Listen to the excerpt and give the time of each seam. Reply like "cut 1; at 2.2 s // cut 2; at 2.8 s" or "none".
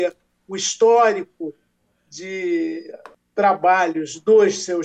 none